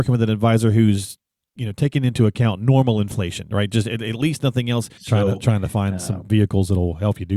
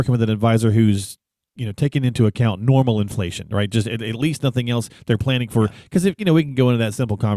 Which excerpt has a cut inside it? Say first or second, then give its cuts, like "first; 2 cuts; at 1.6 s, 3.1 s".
first; 1 cut; at 5.0 s